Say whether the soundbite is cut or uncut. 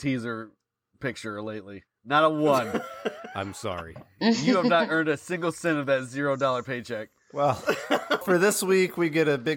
cut